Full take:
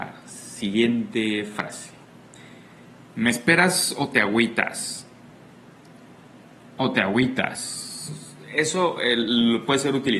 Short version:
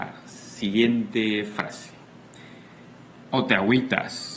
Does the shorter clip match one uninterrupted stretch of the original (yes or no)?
no